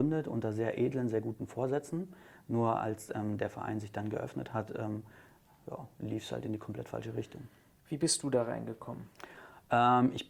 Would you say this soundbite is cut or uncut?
uncut